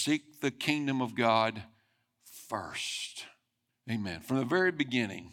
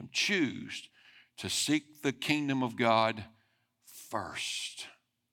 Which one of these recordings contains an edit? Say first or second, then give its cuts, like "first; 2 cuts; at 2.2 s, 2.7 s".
first; 1 cut; at 3.7 s